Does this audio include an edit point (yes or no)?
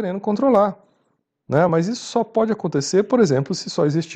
no